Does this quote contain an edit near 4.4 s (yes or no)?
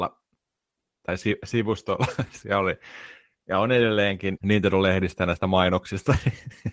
yes